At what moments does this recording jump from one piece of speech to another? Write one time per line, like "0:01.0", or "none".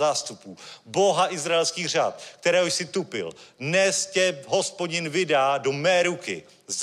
none